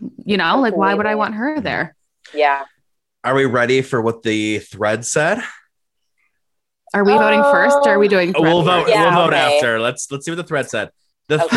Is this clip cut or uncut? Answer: uncut